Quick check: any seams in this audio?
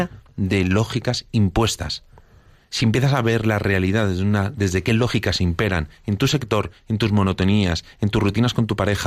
no; 0 cuts

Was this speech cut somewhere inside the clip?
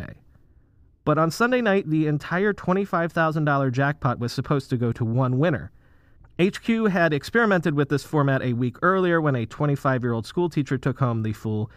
yes; 1 cut; at 6.2 s

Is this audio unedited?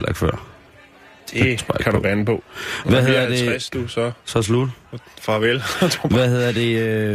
yes; 0 cuts

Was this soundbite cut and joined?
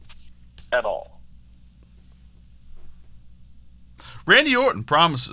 no; 0 cuts

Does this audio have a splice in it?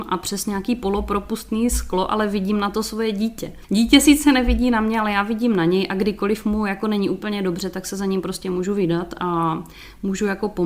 no; 0 cuts

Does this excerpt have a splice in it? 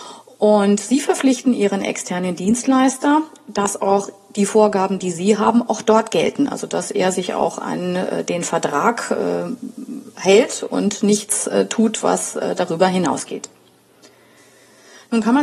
no; 0 cuts

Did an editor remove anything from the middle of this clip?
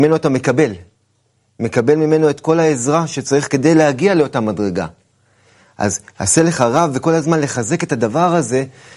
no; 0 cuts

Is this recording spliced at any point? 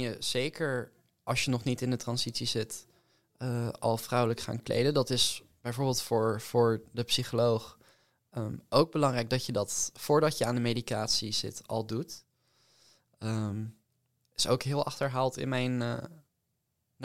no; 0 cuts

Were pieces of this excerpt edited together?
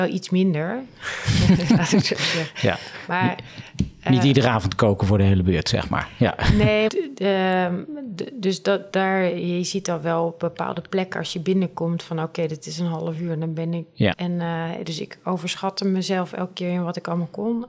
yes; 2 cuts; at 6.9 s, 14.1 s

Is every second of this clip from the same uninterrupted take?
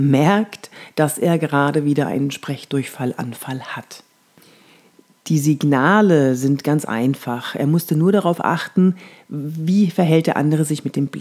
yes; 0 cuts

